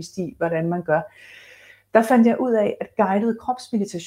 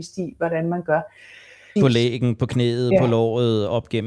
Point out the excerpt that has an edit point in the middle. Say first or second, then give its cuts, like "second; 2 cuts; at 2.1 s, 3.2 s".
second; 1 cut; at 1.8 s